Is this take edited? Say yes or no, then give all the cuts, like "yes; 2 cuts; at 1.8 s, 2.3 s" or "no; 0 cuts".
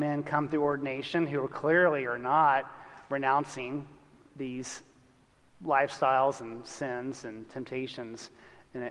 no; 0 cuts